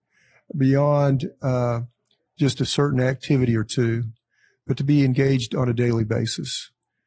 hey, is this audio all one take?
yes; 0 cuts

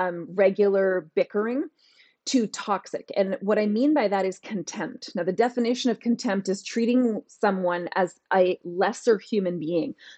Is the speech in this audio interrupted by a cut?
no; 0 cuts

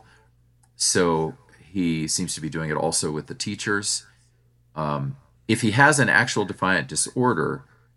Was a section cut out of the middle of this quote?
no; 0 cuts

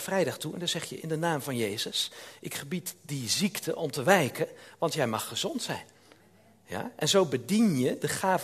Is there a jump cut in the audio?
no; 0 cuts

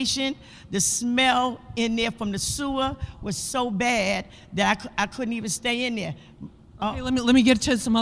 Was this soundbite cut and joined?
no; 0 cuts

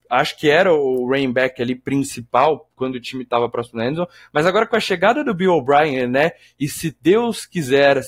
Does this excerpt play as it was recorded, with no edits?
yes; 0 cuts

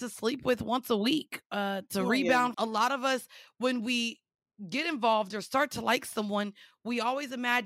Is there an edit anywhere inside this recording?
yes; 1 cut; at 2.5 s

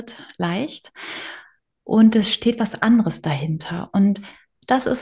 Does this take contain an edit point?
no; 0 cuts

